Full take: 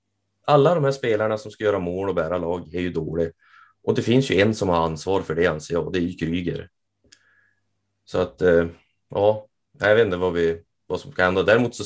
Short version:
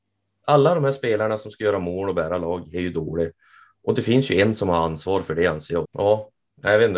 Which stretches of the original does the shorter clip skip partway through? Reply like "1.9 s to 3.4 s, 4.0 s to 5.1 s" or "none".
5.8 s to 9.0 s